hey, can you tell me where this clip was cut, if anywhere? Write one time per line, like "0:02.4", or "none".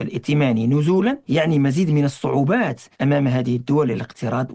0:01.2
0:02.9